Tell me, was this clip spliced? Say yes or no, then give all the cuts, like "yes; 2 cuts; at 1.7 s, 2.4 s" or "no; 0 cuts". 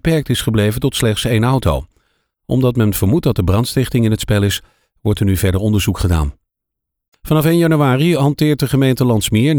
no; 0 cuts